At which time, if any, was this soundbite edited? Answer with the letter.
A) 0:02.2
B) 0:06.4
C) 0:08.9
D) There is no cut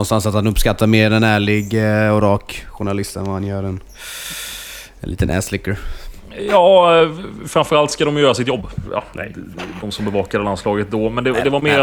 C